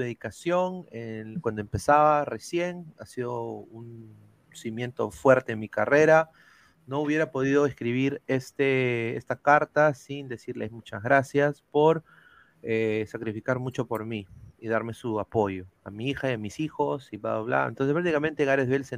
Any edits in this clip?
yes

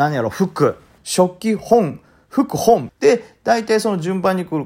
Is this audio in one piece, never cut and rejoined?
no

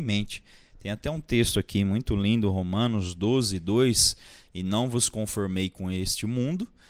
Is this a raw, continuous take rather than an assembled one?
no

